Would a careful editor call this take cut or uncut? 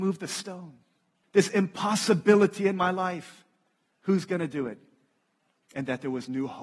cut